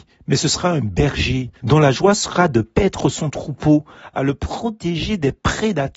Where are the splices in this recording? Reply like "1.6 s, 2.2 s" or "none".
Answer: 1.6 s, 4.1 s

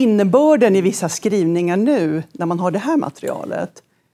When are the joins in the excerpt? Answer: none

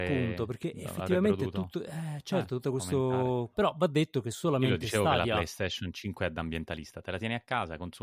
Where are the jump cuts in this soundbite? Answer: 3.5 s

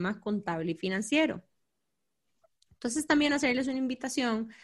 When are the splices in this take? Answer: none

